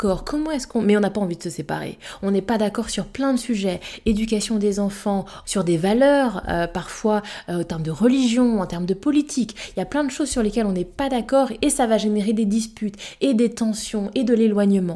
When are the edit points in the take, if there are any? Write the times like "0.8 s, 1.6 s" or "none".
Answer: 5.4 s